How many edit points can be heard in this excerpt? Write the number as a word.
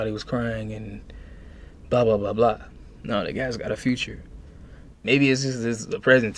one